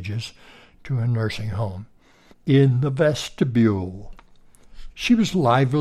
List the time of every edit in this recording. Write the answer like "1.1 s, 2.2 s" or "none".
2.3 s, 4.9 s